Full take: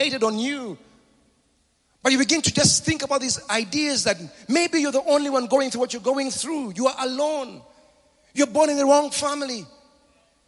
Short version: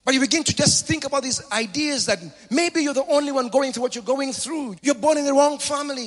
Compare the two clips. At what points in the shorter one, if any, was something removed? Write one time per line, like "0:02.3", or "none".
0:04.8